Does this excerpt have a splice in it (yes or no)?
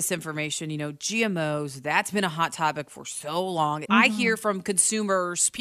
yes